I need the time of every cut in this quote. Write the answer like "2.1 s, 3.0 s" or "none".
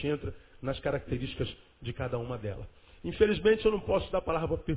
none

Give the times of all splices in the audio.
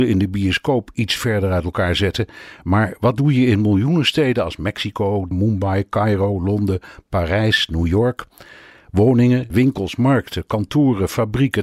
5.3 s, 9.5 s

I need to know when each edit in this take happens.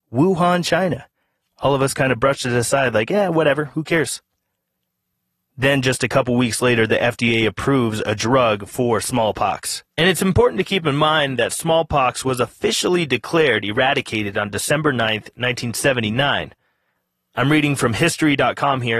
5.4 s, 9.9 s

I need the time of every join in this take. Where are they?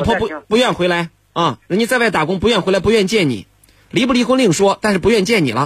none

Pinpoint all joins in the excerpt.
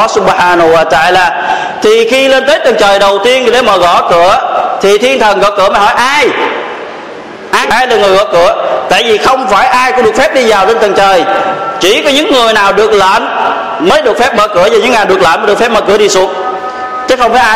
7.6 s

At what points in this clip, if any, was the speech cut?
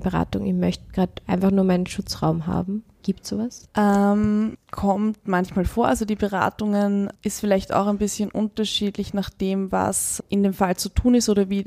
none

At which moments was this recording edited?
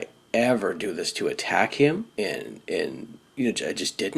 2.1 s

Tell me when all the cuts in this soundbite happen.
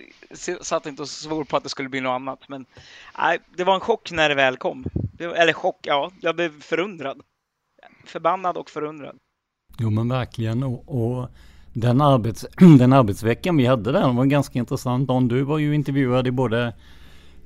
none

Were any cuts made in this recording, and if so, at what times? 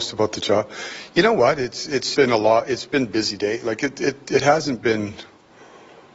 2.1 s

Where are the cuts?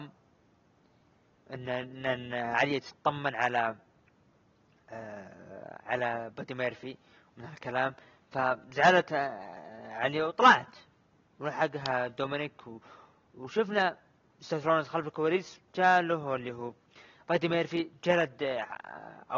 15.7 s

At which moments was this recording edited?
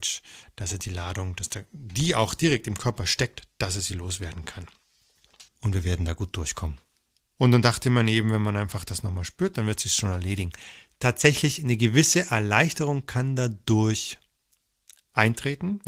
5.5 s

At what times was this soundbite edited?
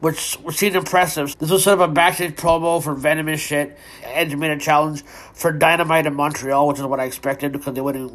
1.3 s, 4.0 s

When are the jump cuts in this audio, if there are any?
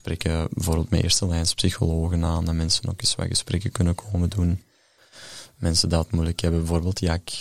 none

